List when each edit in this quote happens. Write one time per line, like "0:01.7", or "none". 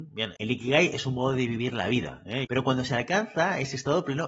0:02.4